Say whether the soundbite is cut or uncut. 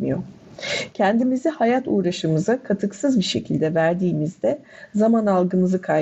uncut